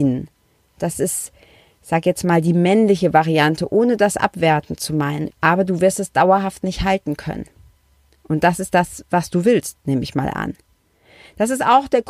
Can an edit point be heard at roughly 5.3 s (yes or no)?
yes